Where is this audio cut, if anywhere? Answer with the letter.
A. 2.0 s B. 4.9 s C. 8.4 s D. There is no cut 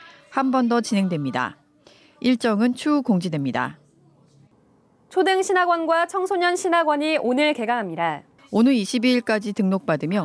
C